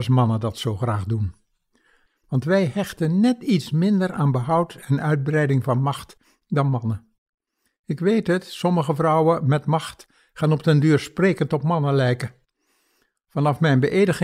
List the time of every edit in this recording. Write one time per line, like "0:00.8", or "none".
0:02.1

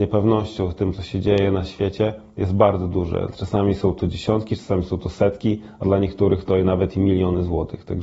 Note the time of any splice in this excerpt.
0:03.3

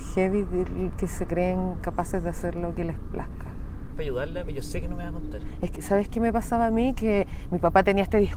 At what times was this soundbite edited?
0:03.9
0:05.8

